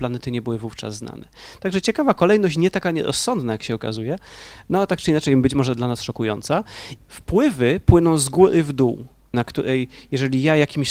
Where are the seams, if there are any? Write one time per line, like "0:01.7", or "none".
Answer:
0:07.0
0:09.3